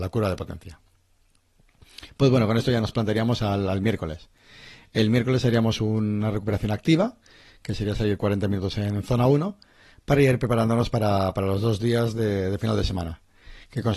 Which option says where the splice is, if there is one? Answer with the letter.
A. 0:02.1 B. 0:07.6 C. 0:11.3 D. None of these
D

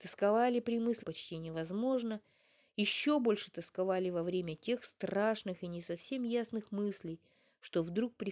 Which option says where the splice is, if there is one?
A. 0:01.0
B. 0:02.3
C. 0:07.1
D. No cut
A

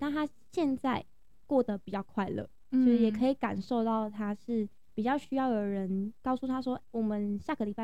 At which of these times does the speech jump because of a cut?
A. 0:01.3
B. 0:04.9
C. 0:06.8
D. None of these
C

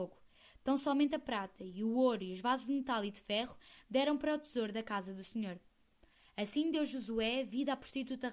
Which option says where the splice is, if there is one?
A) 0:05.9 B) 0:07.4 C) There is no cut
C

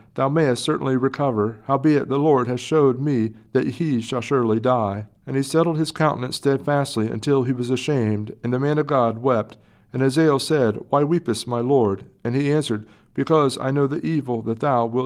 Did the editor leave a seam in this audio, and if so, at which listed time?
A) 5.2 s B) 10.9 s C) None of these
A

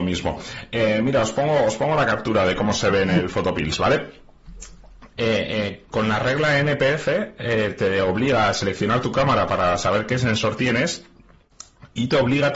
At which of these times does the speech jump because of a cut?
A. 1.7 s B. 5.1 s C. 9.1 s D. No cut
B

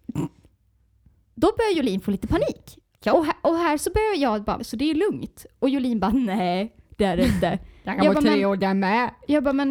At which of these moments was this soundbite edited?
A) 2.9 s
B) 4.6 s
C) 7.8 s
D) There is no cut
B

